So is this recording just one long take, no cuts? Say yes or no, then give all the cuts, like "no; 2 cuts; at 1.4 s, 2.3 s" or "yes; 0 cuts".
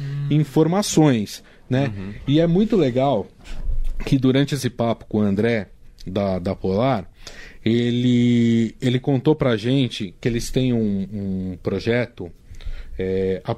yes; 0 cuts